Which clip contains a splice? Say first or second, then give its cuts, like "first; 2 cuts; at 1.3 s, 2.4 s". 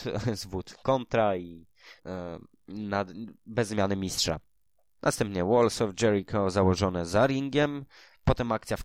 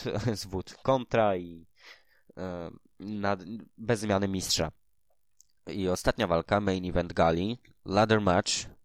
first; 2 cuts; at 2.0 s, 5.0 s